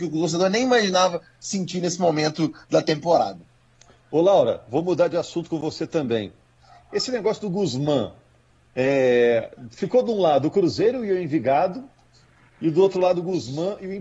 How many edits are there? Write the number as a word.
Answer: zero